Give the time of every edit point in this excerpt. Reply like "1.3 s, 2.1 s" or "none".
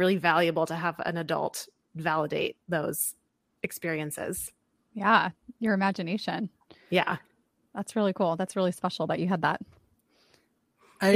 none